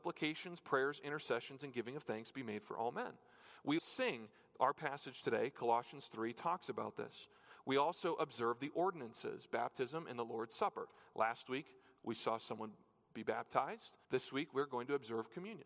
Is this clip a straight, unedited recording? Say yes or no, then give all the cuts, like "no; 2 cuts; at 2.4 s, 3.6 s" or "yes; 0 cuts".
no; 2 cuts; at 3.8 s, 14.0 s